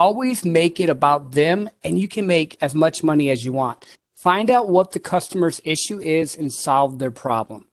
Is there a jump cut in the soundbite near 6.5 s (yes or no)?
no